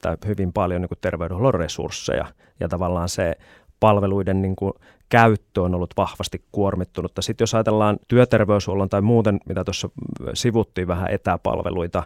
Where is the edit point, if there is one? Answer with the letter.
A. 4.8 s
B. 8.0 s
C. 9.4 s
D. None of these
B